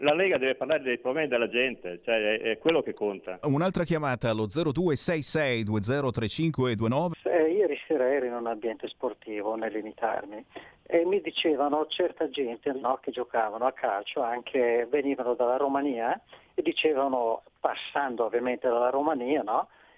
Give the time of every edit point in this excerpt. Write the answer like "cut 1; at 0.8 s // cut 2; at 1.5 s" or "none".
cut 1; at 3.4 s // cut 2; at 7.1 s // cut 3; at 12.8 s

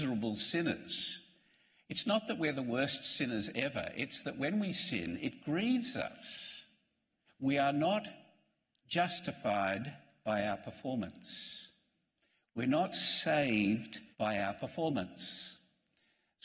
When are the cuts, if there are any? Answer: cut 1; at 7.3 s // cut 2; at 14.1 s

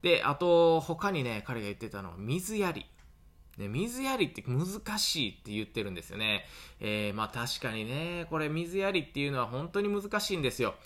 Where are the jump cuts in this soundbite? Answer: none

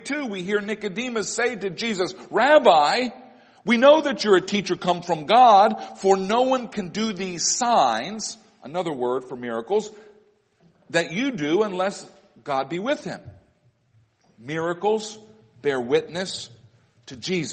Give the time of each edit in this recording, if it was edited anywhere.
none

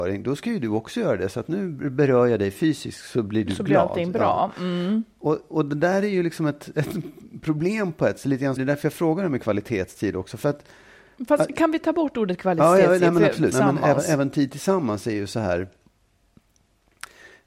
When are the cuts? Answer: cut 1; at 8.6 s // cut 2; at 13.5 s

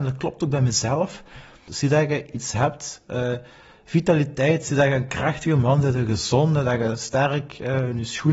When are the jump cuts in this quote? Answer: cut 1; at 1.7 s

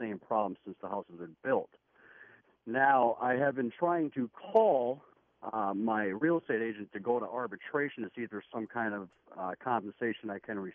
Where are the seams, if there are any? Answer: none

